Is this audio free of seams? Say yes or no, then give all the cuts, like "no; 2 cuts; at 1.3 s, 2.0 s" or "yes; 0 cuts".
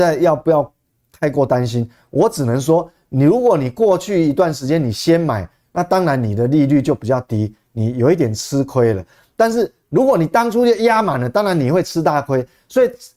yes; 0 cuts